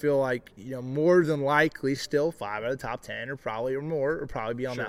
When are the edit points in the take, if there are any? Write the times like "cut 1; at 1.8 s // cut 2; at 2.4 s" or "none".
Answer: none